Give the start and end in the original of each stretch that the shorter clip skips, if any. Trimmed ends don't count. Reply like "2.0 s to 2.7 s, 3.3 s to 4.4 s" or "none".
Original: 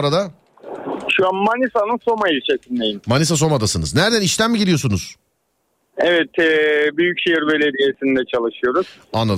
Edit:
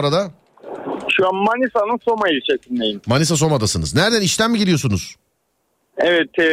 none